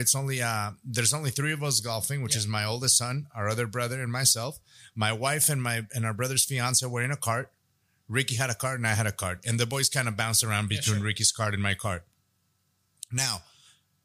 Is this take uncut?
yes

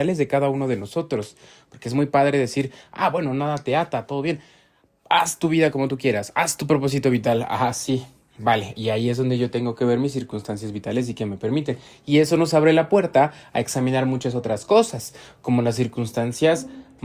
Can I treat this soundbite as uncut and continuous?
yes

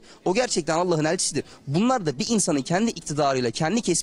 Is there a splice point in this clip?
no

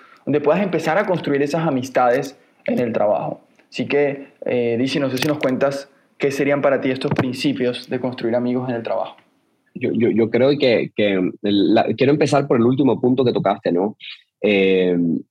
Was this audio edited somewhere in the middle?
no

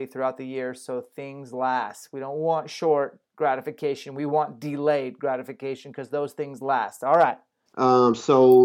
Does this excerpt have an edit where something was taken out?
yes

